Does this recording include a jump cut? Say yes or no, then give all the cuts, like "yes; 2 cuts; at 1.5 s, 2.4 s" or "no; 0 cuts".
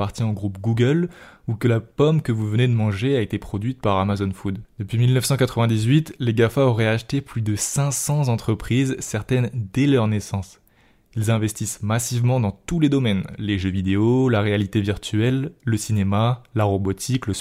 no; 0 cuts